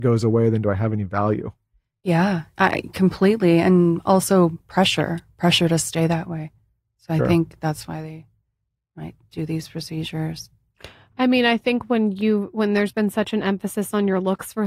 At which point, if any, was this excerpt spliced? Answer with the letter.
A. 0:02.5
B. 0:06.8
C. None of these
C